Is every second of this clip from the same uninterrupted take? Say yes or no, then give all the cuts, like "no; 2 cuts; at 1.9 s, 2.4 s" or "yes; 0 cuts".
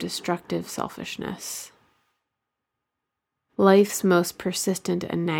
no; 1 cut; at 3.5 s